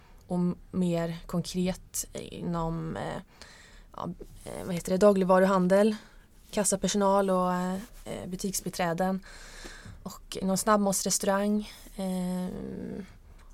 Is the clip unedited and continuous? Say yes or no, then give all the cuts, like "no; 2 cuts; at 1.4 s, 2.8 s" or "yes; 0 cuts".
no; 1 cut; at 10.4 s